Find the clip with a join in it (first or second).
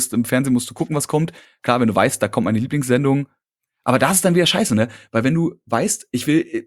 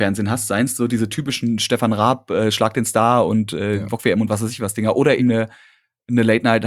second